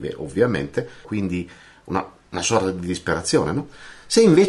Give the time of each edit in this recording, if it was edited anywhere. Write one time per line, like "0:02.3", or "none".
0:01.0